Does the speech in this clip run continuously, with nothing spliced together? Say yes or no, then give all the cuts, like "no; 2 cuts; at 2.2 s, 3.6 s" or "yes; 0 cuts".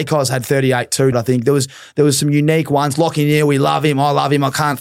no; 1 cut; at 1.1 s